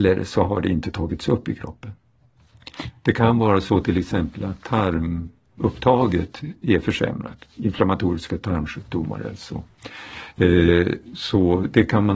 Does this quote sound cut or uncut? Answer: uncut